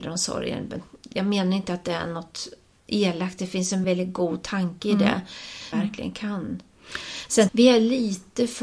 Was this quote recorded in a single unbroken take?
no; 3 cuts; at 3.8 s, 5.7 s, 7.5 s

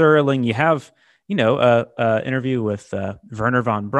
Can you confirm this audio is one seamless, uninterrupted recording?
yes; 0 cuts

